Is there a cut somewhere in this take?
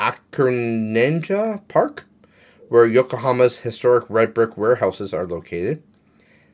no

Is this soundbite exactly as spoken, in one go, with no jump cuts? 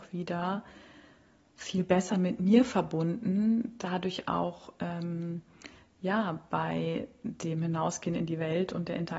yes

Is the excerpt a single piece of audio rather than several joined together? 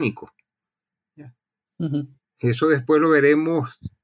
no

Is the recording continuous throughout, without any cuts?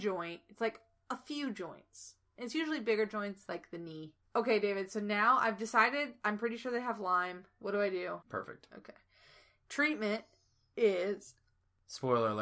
no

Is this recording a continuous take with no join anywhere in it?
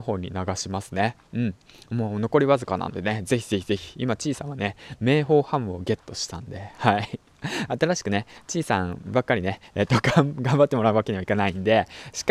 yes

